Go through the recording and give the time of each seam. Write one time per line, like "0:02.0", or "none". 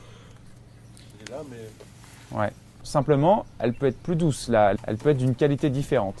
0:01.1
0:02.8
0:04.8